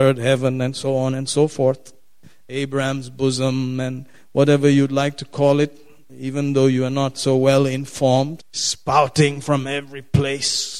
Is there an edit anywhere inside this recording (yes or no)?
yes